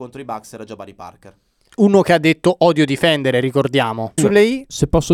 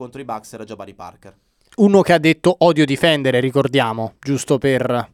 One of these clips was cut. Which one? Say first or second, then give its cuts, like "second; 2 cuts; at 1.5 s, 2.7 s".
first; 1 cut; at 4.2 s